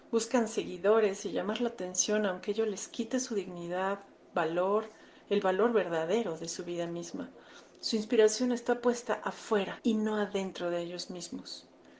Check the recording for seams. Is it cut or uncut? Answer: uncut